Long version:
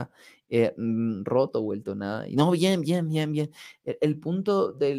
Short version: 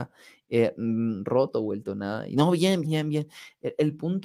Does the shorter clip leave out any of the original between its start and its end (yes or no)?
yes